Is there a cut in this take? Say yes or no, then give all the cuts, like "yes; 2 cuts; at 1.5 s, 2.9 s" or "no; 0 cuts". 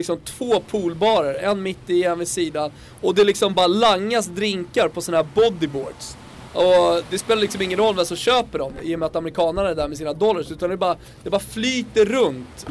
no; 0 cuts